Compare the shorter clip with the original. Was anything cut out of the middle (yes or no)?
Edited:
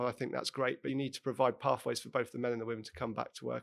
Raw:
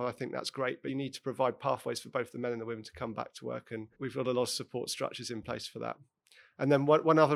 no